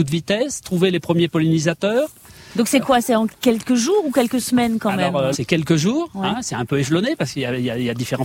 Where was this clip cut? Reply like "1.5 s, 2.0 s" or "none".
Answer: 5.3 s